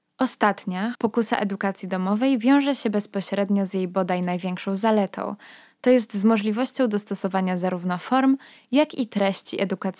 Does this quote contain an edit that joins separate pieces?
yes; 1 cut; at 0.9 s

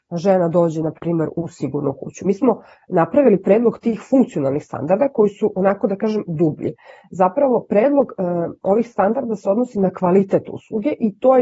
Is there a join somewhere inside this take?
no; 0 cuts

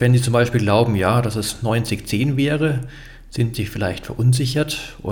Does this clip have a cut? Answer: no; 0 cuts

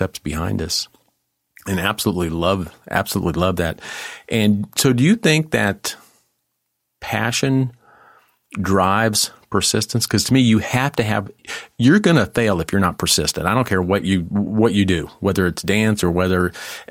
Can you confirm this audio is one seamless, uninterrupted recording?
yes; 0 cuts

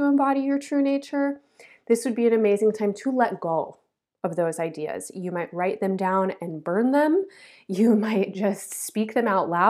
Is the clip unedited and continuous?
yes; 0 cuts

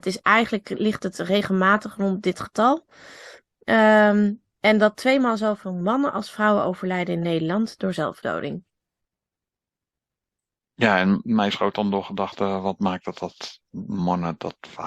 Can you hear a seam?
no; 0 cuts

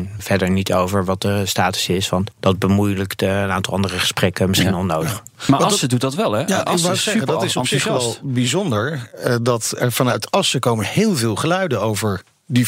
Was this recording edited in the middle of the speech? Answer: no; 0 cuts

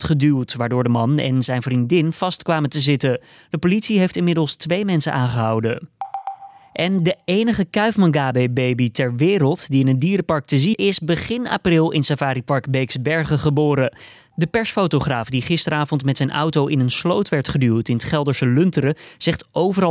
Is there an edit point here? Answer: yes; 2 cuts; at 10.7 s, 14.3 s

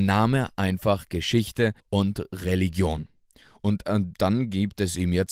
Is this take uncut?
no; 1 cut; at 1.8 s

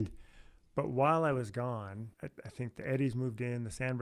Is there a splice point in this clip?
yes; 1 cut; at 2.1 s

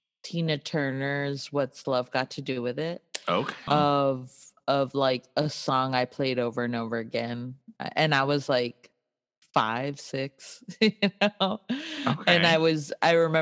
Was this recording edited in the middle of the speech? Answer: yes; 1 cut; at 3.7 s

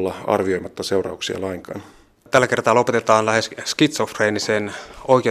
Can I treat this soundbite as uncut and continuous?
yes; 0 cuts

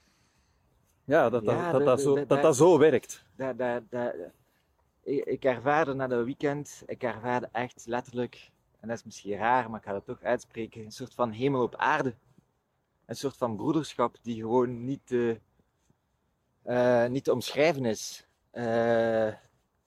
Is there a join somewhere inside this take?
no; 0 cuts

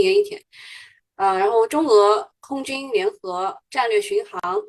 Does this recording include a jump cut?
no; 0 cuts

